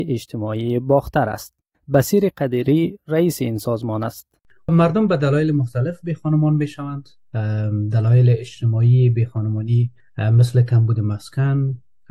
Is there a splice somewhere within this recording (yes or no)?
no